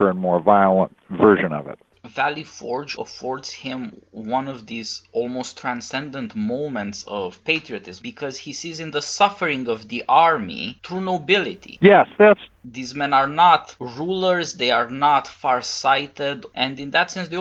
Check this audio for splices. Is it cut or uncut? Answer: cut